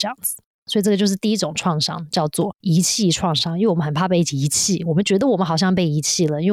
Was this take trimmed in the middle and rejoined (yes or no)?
no